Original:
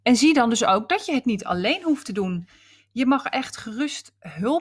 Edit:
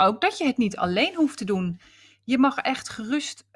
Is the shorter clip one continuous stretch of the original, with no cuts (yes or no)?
yes